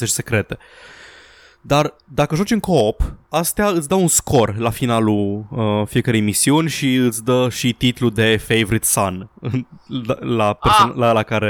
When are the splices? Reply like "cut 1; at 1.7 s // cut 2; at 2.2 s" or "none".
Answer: none